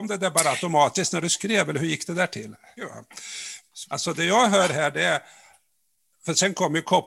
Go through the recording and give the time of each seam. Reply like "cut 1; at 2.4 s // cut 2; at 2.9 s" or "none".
cut 1; at 2.8 s // cut 2; at 3.8 s